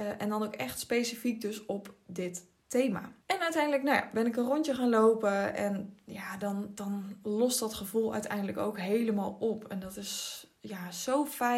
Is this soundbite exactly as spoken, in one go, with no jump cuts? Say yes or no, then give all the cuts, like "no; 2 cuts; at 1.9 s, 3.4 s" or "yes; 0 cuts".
no; 1 cut; at 3.2 s